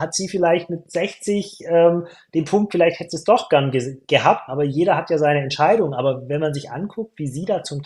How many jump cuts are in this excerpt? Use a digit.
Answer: 2